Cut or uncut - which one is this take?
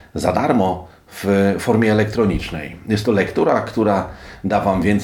uncut